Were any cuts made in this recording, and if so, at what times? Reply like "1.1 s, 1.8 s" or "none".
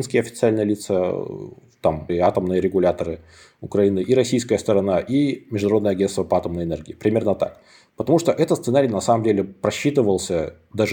2.1 s